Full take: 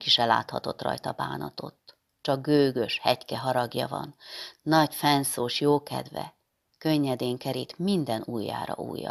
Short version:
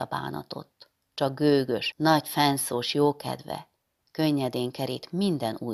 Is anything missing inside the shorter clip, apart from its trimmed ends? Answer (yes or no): yes